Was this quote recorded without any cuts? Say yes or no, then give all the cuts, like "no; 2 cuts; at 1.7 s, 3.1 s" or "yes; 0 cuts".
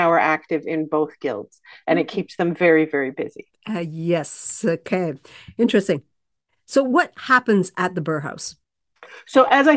yes; 0 cuts